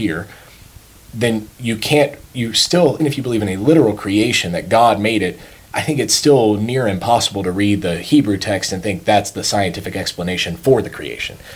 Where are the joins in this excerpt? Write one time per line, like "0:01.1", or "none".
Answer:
0:03.0